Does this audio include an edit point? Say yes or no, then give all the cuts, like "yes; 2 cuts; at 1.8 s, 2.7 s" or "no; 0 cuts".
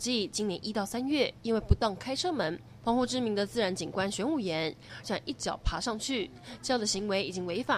yes; 2 cuts; at 2.8 s, 5.0 s